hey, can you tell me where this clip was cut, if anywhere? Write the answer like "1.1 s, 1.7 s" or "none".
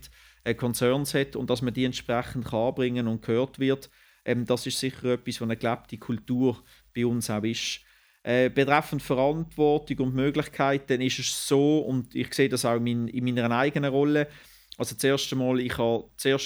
none